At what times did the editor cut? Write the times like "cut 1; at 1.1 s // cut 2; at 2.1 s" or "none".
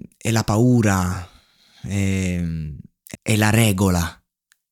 cut 1; at 3.1 s